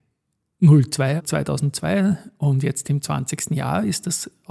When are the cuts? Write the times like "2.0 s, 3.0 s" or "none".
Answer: 1.2 s